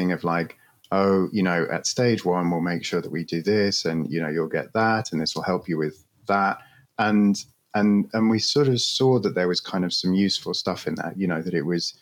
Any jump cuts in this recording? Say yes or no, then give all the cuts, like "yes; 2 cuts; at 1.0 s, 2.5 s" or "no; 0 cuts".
yes; 1 cut; at 8.1 s